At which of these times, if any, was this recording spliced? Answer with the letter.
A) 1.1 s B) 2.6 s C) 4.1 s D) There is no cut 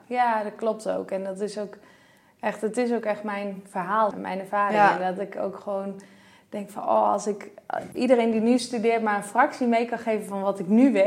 C